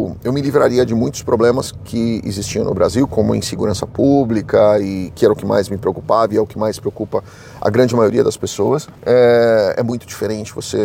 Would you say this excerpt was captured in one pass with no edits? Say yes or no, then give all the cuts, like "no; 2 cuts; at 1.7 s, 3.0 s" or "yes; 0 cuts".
no; 1 cut; at 9.0 s